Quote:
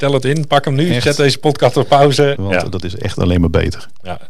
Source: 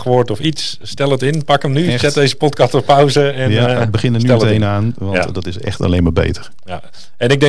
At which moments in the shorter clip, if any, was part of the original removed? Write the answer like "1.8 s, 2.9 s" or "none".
2.3 s